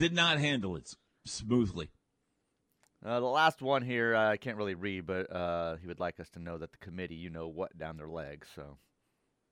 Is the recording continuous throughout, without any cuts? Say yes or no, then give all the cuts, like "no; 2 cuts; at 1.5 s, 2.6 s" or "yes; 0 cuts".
yes; 0 cuts